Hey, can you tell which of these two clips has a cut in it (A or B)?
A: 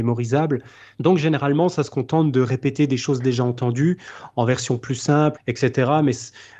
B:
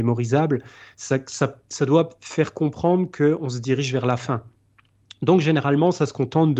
A